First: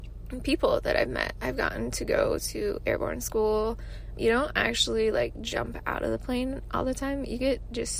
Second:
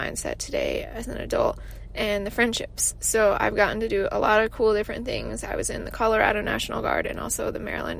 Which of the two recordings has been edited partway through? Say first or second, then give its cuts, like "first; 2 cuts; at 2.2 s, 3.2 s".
first; 1 cut; at 4.1 s